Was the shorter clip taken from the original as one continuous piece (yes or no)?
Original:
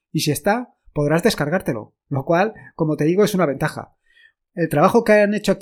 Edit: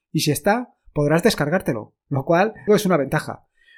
no